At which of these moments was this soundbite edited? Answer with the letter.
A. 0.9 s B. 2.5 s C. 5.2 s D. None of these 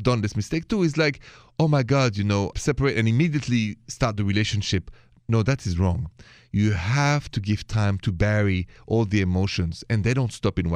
B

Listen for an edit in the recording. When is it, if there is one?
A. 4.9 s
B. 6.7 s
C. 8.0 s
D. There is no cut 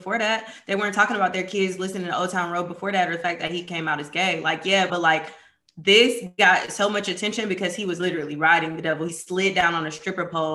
A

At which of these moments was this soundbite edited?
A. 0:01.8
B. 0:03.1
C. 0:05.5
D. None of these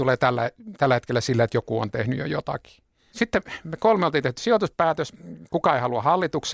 B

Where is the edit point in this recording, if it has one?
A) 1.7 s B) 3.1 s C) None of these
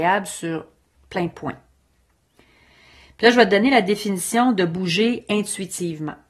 C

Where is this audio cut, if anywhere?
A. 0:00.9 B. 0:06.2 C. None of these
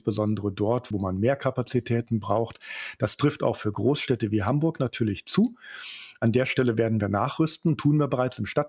A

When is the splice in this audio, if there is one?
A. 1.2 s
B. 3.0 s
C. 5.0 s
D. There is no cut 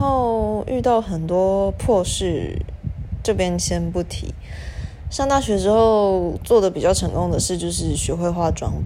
D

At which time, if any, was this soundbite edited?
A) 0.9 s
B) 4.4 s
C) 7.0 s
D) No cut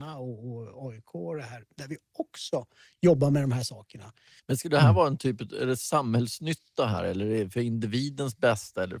B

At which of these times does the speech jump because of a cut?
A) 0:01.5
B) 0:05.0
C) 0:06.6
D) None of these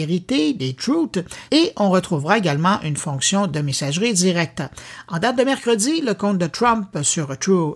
A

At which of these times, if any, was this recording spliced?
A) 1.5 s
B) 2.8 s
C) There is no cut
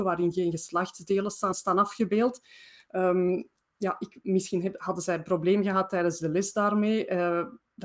A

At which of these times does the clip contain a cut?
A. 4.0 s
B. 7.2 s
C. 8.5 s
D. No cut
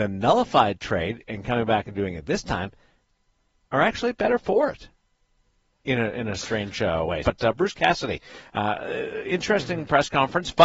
B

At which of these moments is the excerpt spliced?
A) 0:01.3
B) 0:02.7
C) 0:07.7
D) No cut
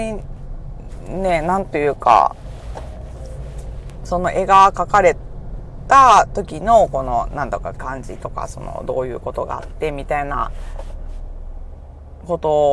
C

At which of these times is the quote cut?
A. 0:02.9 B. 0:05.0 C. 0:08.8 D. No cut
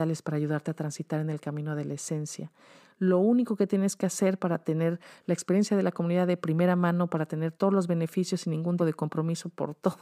C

